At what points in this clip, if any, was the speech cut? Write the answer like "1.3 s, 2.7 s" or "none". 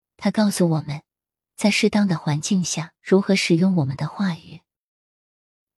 1.5 s, 3.0 s